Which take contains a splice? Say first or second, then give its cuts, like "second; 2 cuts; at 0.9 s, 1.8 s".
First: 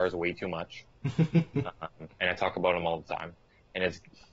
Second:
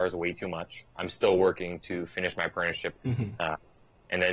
second; 2 cuts; at 0.9 s, 2.9 s